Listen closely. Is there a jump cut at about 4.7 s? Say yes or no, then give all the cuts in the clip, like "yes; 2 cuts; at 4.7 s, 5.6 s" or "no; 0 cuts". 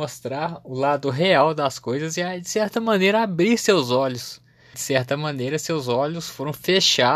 yes; 1 cut; at 4.7 s